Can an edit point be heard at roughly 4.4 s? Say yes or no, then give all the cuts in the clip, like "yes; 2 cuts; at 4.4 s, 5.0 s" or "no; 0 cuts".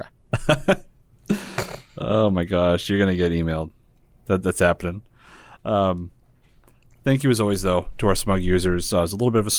no; 0 cuts